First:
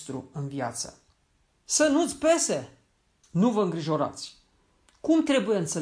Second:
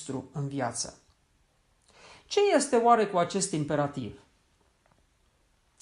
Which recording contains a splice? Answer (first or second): first